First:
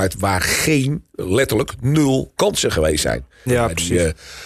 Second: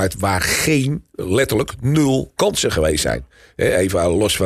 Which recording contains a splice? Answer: first; 1 cut; at 3.5 s

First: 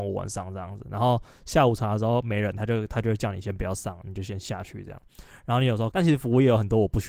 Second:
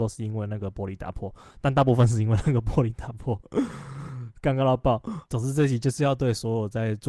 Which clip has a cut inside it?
first; 1 cut; at 5.9 s

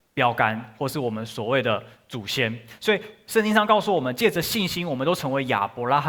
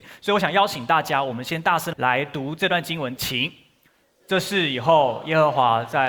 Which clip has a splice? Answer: second; 2 cuts; at 1.9 s, 3.2 s

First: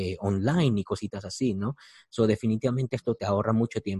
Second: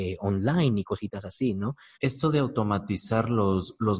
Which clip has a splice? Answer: second; 1 cut; at 1.9 s

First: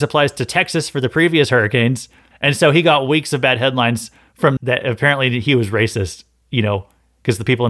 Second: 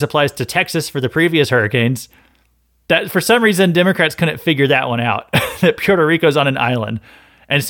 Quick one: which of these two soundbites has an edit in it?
first; 2 cuts; at 2.3 s, 4.6 s

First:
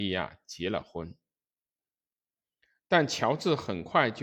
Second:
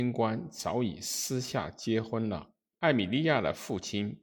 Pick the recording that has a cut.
second; 1 cut; at 2.7 s

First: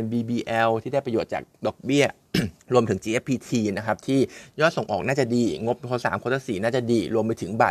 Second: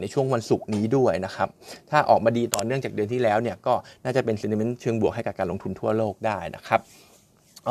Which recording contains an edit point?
first; 2 cuts; at 2.6 s, 6.0 s

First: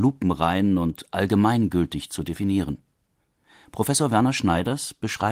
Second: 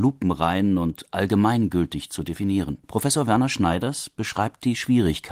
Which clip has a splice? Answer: second; 1 cut; at 2.8 s

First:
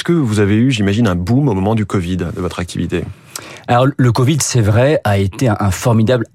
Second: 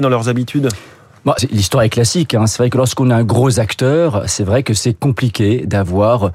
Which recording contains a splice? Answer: second; 1 cut; at 1.4 s

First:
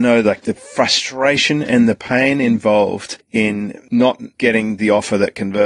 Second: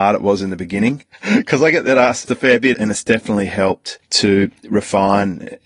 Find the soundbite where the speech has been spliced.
second; 2 cuts; at 1.1 s, 2.7 s

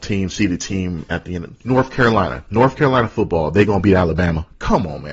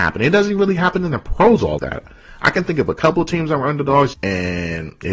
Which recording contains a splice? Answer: second; 2 cuts; at 1.8 s, 4.1 s

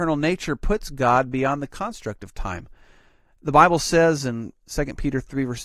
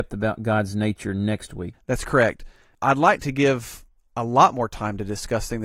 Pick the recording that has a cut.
second; 1 cut; at 1.7 s

